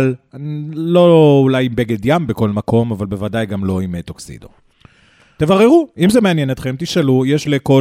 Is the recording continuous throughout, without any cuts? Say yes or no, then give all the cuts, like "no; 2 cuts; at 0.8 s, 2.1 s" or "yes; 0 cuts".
yes; 0 cuts